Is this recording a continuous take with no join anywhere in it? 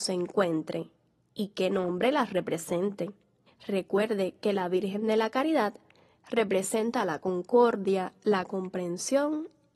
no; 1 cut; at 3.5 s

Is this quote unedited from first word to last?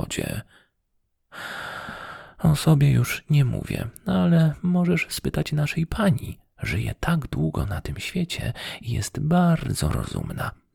yes; 0 cuts

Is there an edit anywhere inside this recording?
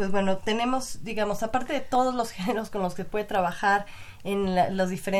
no; 0 cuts

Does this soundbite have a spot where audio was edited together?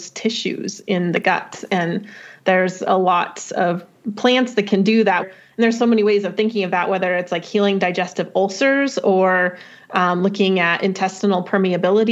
yes; 1 cut; at 5.2 s

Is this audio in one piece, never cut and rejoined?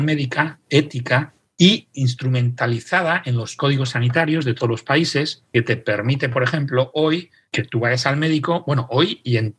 yes; 0 cuts

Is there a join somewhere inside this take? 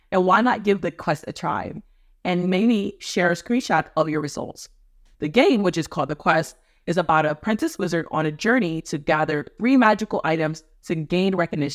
yes; 1 cut; at 5.1 s

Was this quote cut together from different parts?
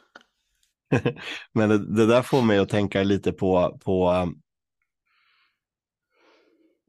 no; 0 cuts

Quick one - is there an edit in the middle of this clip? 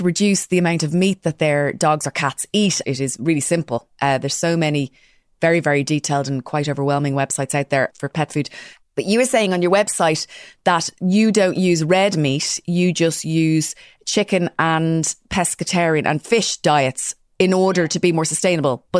yes; 1 cut; at 2.8 s

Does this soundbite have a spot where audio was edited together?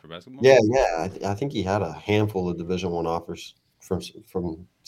no; 0 cuts

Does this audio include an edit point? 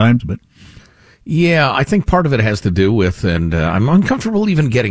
no; 0 cuts

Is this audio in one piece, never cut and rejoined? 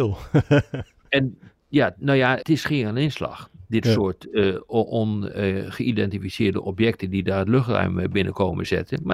no; 1 cut; at 2.4 s

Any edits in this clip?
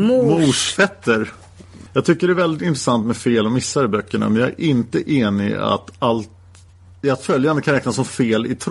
yes; 1 cut; at 1.9 s

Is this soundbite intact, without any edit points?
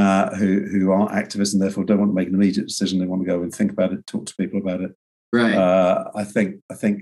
yes; 0 cuts

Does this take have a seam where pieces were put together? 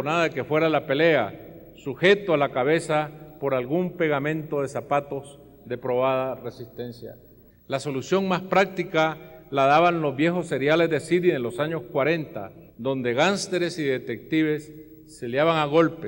yes; 2 cuts; at 7.5 s, 12.7 s

